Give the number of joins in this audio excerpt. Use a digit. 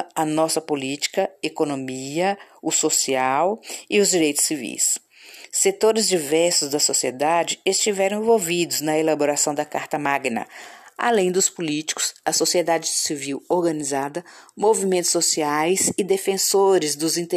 0